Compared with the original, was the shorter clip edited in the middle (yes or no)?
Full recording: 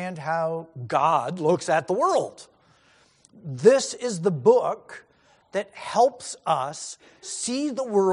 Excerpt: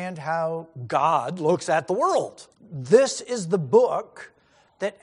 yes